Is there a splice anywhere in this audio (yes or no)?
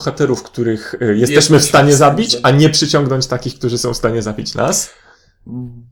no